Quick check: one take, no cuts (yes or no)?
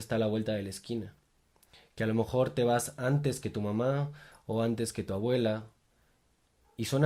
yes